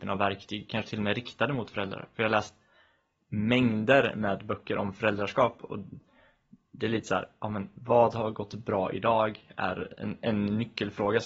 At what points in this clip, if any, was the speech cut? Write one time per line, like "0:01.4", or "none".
none